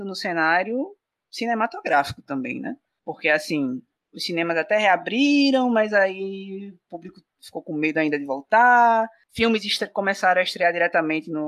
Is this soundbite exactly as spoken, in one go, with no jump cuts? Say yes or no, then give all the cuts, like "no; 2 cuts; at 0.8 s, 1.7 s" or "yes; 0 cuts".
yes; 0 cuts